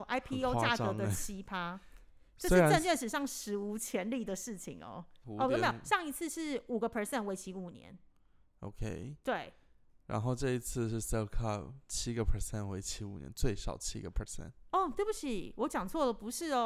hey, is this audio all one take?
no; 1 cut; at 5.2 s

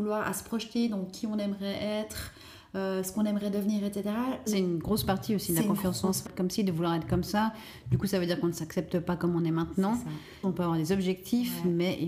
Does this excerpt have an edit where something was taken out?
yes; 3 cuts; at 4.5 s, 6.3 s, 10.4 s

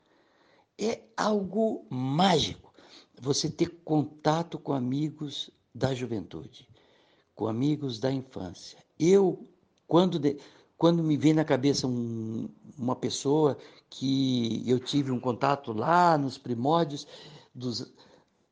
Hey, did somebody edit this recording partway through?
no; 0 cuts

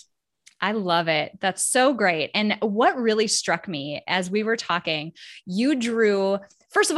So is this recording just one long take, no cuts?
yes; 0 cuts

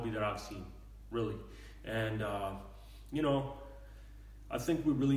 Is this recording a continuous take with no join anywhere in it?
yes; 0 cuts

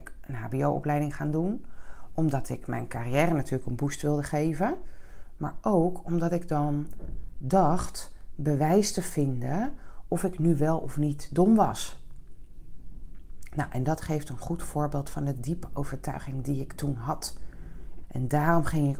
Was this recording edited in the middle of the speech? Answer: yes; 1 cut; at 18.0 s

